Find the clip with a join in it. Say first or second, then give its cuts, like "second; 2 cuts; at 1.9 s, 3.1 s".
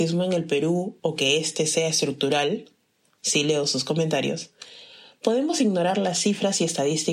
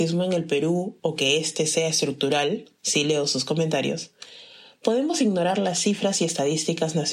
second; 1 cut; at 2.7 s